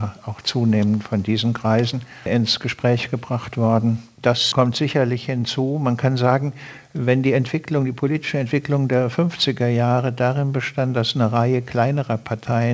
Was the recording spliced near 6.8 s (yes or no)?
no